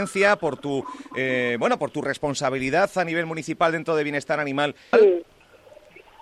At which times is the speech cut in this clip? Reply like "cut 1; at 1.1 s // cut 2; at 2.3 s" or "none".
cut 1; at 4.9 s

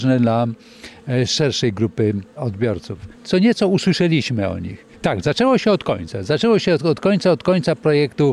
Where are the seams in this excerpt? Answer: cut 1; at 3.1 s // cut 2; at 4.9 s

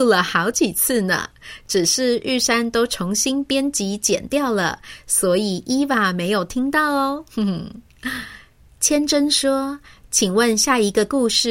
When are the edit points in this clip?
none

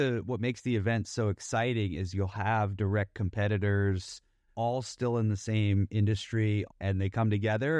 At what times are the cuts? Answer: cut 1; at 4.5 s // cut 2; at 6.7 s

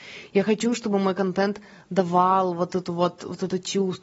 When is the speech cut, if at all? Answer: none

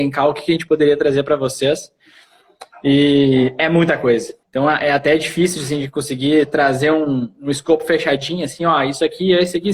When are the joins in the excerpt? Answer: cut 1; at 4.4 s

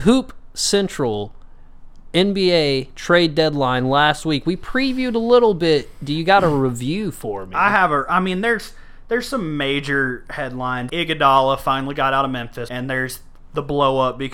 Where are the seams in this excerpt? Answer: cut 1; at 10.9 s // cut 2; at 12.7 s

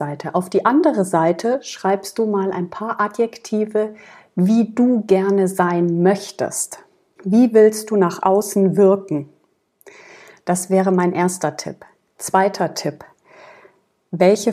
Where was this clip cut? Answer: cut 1; at 7.2 s

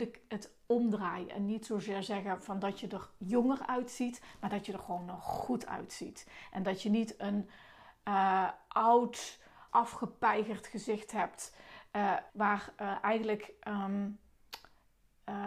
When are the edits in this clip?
cut 1; at 9.7 s // cut 2; at 12.3 s

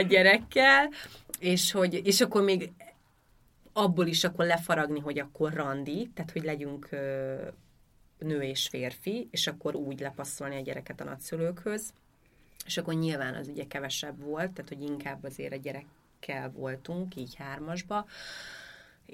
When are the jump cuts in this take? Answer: none

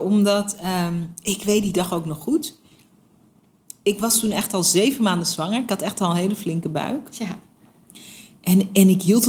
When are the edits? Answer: none

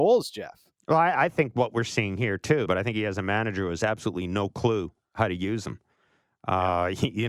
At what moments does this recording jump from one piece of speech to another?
cut 1; at 2.7 s

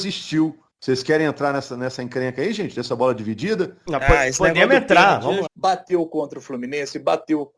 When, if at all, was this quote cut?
cut 1; at 3.9 s // cut 2; at 5.5 s

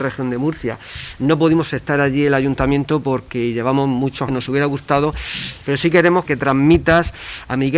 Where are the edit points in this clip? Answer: cut 1; at 4.3 s // cut 2; at 6.2 s

